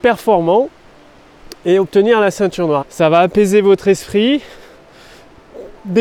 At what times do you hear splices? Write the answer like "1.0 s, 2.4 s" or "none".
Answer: 2.8 s